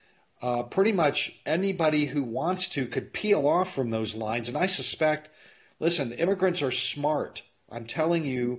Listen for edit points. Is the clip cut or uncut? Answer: uncut